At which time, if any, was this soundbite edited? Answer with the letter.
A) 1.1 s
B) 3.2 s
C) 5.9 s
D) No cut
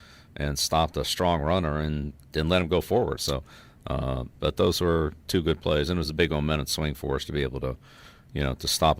B